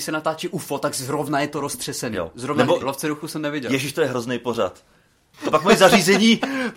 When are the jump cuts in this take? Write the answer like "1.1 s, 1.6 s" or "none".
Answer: 2.8 s, 5.3 s